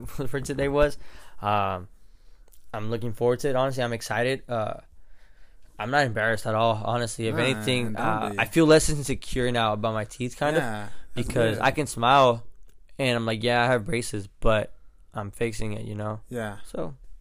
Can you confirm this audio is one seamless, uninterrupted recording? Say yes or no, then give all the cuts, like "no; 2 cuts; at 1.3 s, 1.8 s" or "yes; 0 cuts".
yes; 0 cuts